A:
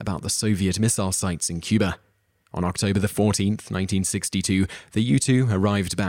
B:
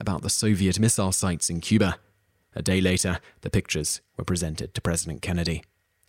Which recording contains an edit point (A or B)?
B